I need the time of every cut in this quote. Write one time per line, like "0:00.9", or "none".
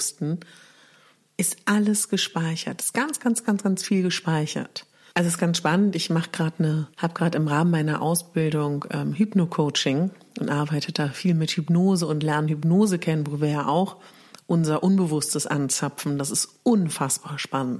0:05.1
0:06.9